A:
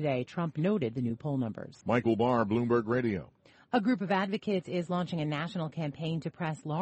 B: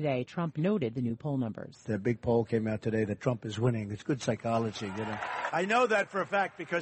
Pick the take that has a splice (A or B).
A